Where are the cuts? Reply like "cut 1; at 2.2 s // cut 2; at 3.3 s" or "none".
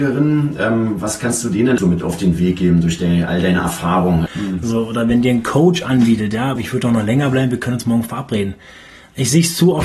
cut 1; at 1.8 s // cut 2; at 4.3 s // cut 3; at 6.6 s